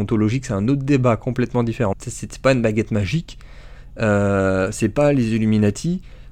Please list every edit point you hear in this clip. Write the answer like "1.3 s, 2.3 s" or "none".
1.9 s